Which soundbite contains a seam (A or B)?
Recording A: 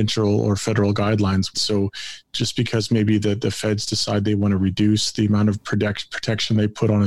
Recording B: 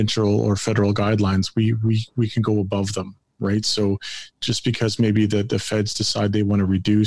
A